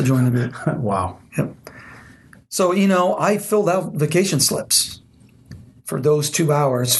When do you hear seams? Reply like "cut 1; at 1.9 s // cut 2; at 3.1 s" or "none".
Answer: none

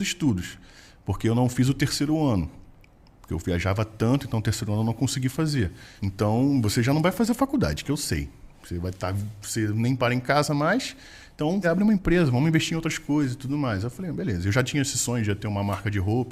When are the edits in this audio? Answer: cut 1; at 6.0 s // cut 2; at 11.6 s

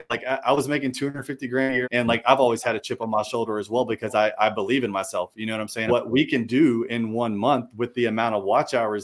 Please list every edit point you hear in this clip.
cut 1; at 1.8 s // cut 2; at 5.9 s

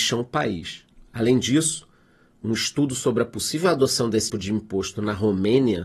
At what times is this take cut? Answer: cut 1; at 4.3 s

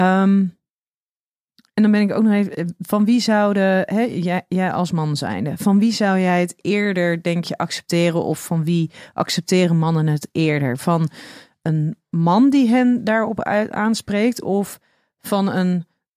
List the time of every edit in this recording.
none

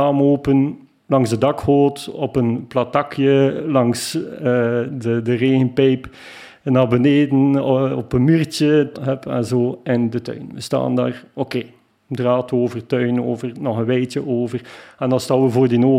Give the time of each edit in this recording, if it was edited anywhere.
cut 1; at 8.9 s

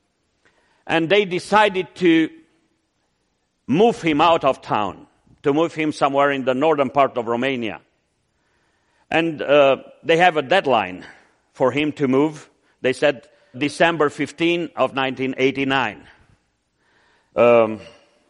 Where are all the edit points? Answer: cut 1; at 13.5 s // cut 2; at 17.3 s

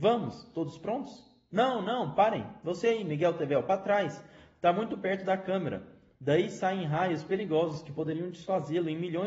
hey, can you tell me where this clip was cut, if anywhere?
none

